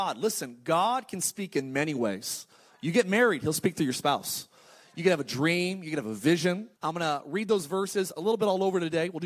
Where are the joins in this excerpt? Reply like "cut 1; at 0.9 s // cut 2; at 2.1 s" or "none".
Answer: cut 1; at 6.8 s